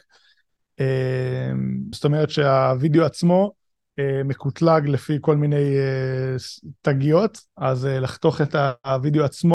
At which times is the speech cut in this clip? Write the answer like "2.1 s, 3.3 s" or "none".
1.9 s, 7.5 s